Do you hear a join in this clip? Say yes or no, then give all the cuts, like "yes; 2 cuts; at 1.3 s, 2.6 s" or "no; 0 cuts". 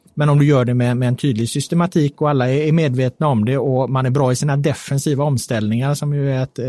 no; 0 cuts